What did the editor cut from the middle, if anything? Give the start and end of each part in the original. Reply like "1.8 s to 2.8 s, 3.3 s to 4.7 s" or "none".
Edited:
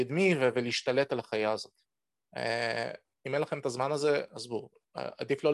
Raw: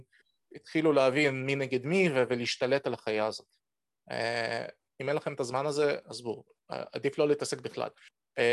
none